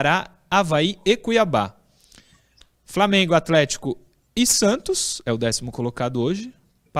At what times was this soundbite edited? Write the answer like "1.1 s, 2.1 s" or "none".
none